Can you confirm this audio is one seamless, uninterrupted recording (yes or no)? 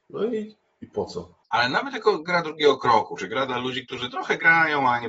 no